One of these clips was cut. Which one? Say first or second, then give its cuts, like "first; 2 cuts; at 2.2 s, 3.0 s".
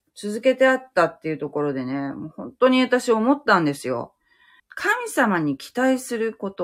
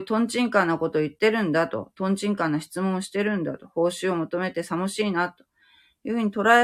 first; 1 cut; at 4.6 s